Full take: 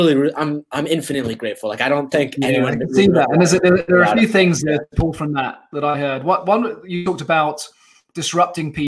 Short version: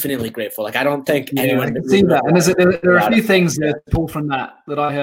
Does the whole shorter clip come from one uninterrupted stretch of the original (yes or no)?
yes